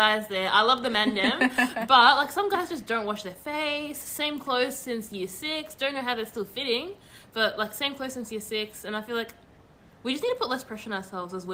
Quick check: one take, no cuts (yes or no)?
yes